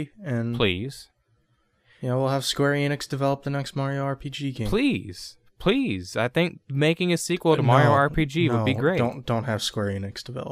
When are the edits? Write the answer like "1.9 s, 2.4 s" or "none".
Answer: none